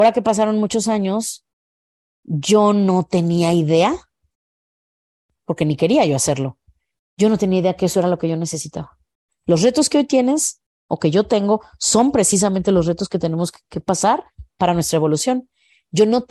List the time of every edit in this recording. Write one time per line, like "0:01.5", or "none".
0:09.3
0:13.6

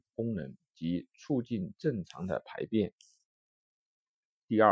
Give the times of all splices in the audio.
none

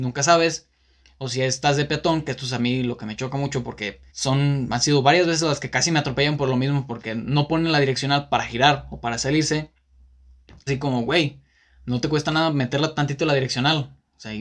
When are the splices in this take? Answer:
0:04.1
0:10.7

